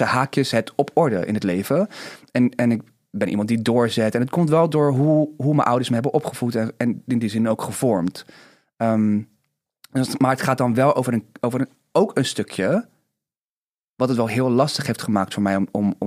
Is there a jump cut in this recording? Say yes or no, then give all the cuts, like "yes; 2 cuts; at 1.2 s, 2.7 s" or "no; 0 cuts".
no; 0 cuts